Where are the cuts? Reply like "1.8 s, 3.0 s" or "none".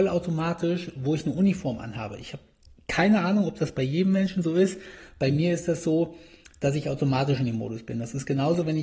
none